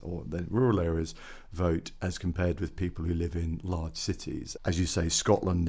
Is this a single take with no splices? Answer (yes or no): no